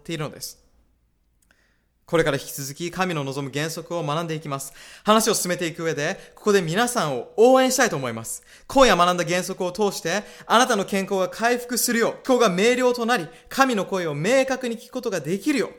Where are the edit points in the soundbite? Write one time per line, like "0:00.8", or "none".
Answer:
0:12.2